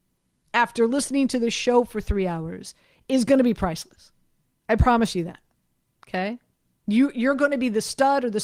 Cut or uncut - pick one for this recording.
uncut